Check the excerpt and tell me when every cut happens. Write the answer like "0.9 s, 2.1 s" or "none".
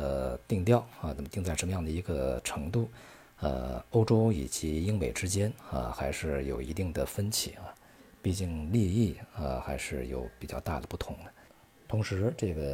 none